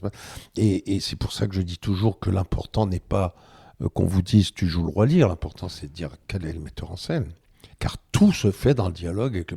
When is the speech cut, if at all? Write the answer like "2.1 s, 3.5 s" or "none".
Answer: 7.7 s